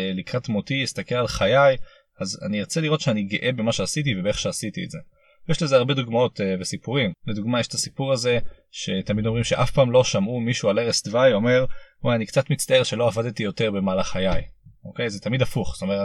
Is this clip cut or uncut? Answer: uncut